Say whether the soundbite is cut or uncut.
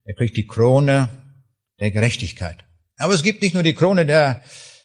uncut